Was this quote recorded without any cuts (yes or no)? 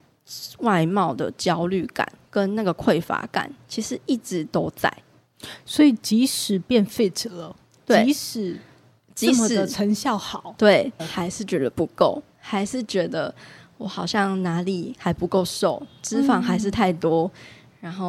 no